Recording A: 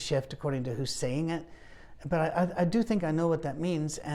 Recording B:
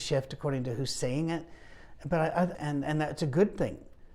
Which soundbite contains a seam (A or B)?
B